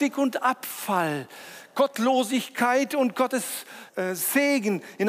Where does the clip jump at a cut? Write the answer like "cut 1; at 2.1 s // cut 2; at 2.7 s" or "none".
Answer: cut 1; at 3.9 s